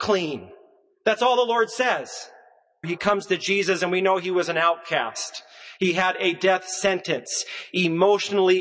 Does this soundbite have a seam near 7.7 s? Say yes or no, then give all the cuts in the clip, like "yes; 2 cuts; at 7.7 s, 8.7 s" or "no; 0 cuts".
no; 1 cut; at 2.8 s